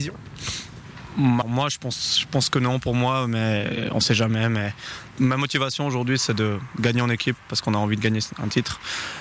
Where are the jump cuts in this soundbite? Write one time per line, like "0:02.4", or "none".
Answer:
0:01.4